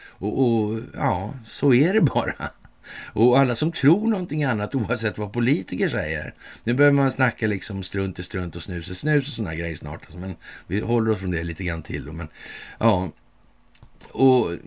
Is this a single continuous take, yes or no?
yes